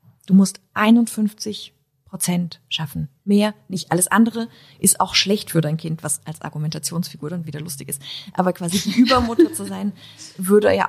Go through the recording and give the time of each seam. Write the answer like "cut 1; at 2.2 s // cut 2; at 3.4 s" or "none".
none